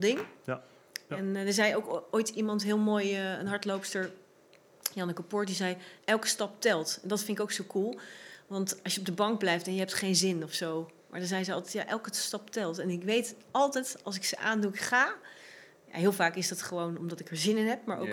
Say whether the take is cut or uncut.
uncut